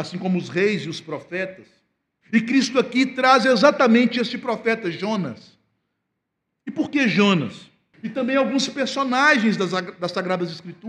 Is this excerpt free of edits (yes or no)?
no